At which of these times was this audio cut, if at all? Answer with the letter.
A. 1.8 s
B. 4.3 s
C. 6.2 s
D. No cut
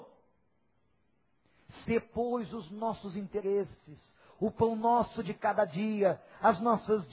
A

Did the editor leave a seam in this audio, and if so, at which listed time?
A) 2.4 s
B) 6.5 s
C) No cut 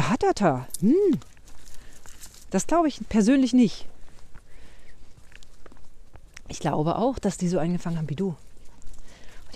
A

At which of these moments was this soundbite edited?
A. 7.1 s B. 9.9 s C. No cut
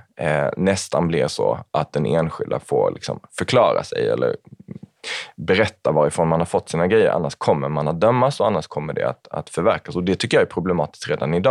C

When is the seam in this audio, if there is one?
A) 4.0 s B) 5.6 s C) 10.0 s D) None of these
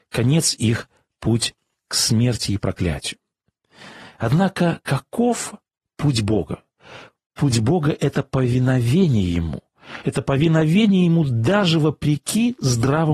D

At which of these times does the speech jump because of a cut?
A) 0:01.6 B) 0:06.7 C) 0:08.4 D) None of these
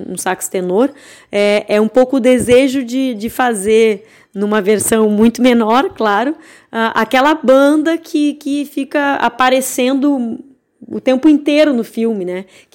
D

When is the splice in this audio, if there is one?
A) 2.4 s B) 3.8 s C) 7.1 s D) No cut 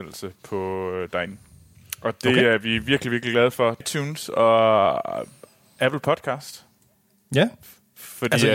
B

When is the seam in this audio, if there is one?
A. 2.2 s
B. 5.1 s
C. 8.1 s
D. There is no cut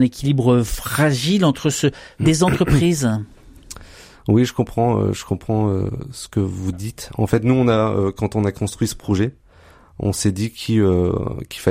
A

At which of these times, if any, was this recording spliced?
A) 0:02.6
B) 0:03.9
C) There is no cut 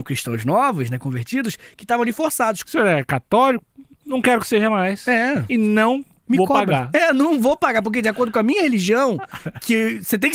A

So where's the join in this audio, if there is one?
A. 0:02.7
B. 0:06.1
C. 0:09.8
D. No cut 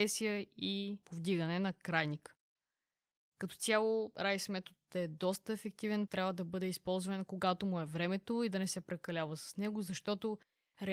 B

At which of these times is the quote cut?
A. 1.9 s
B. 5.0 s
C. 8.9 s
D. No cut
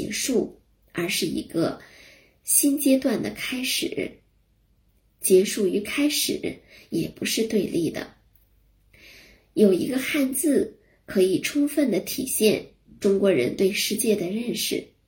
D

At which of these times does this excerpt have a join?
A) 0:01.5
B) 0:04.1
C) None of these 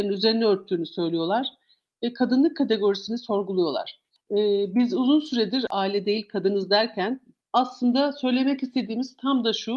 B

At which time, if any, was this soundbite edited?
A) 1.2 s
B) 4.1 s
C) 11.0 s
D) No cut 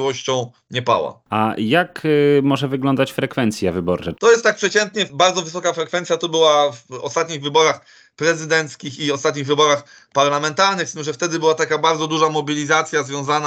B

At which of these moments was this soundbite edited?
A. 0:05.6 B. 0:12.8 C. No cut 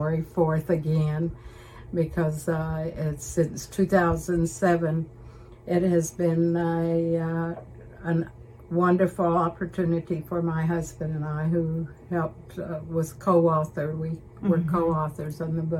B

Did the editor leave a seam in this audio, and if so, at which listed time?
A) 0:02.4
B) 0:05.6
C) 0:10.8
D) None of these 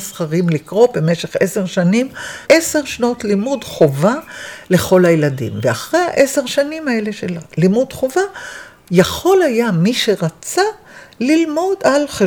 A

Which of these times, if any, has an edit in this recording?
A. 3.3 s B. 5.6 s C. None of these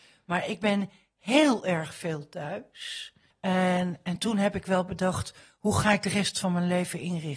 A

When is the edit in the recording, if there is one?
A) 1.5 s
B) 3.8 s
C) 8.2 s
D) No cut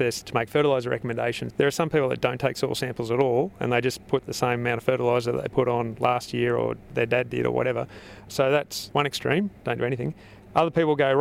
A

